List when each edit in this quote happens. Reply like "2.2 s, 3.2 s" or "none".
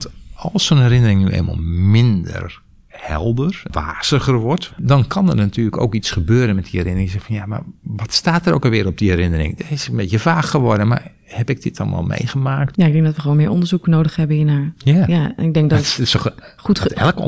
4.7 s, 12.7 s